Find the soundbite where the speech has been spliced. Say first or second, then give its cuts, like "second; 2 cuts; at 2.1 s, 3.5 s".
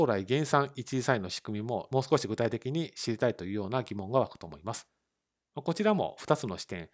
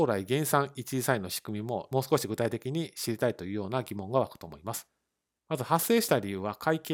second; 1 cut; at 5.4 s